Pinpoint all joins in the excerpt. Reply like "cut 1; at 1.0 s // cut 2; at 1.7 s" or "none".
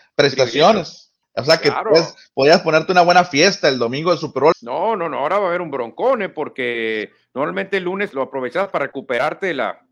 cut 1; at 1.2 s // cut 2; at 4.5 s // cut 3; at 8.1 s